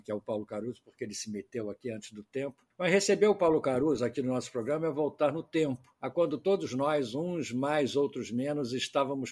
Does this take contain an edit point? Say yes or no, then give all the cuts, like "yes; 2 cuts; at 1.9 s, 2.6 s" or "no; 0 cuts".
no; 0 cuts